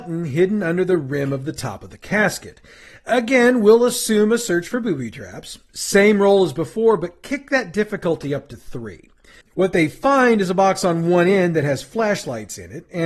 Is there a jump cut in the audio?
yes; 1 cut; at 9.4 s

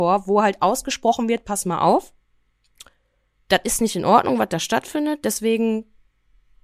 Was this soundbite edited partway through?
no; 0 cuts

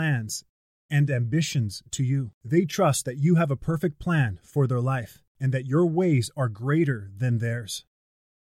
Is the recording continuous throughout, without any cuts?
no; 2 cuts; at 2.4 s, 5.3 s

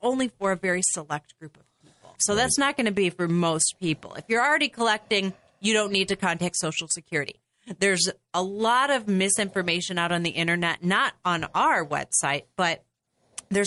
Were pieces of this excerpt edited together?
yes; 1 cut; at 2.2 s

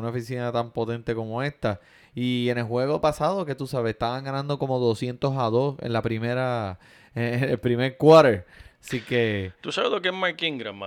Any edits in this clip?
no; 0 cuts

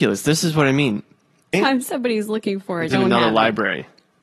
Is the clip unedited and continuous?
no; 2 cuts; at 1.5 s, 2.9 s

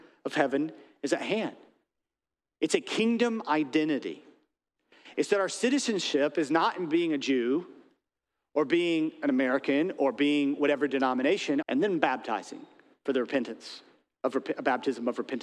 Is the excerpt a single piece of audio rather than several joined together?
no; 1 cut; at 11.6 s

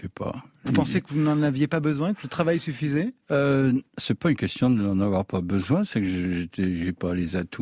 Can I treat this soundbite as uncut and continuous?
no; 1 cut; at 3.2 s

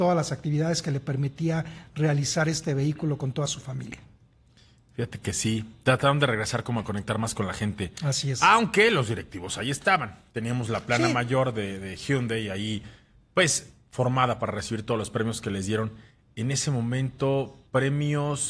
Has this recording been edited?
no; 0 cuts

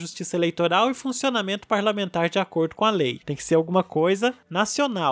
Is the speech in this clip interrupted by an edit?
yes; 1 cut; at 3.2 s

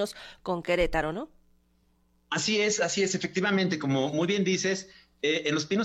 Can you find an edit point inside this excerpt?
no; 0 cuts

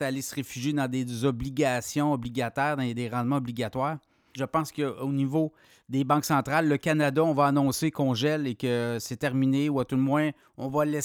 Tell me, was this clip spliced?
yes; 1 cut; at 4.4 s

